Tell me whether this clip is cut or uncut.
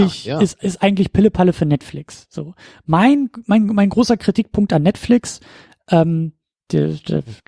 uncut